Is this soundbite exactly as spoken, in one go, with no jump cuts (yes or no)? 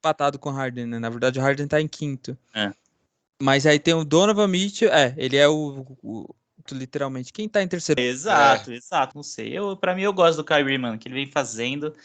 no